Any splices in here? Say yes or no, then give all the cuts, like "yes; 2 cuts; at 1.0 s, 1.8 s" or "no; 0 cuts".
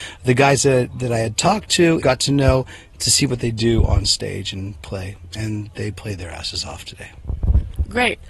yes; 1 cut; at 2.0 s